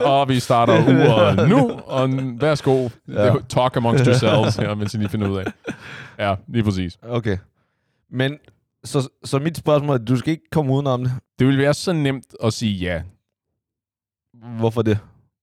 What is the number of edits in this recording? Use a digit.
1